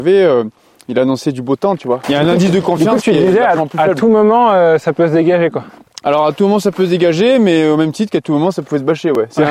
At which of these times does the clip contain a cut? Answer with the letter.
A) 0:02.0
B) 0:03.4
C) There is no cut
A